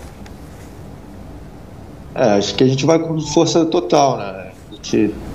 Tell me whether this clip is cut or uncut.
uncut